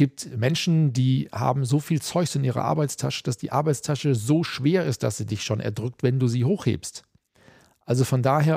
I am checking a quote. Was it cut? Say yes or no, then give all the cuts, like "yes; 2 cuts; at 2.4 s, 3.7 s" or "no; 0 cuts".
no; 0 cuts